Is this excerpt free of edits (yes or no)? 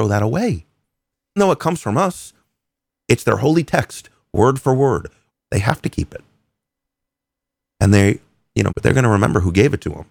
no